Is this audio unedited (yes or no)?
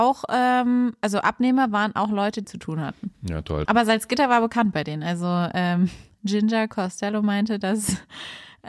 no